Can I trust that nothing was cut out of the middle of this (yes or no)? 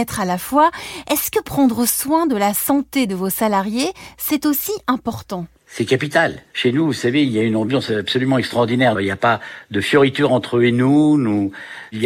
no